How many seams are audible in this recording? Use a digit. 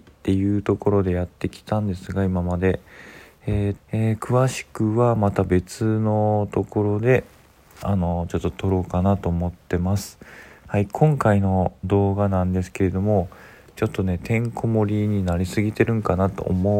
2